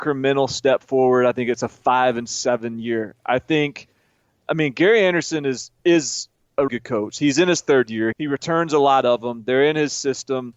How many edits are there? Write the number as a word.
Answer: two